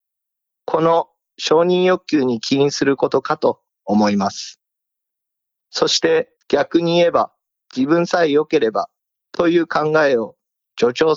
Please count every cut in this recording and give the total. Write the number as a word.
one